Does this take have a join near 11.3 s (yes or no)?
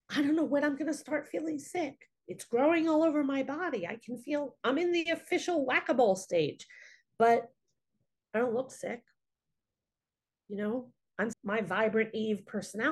yes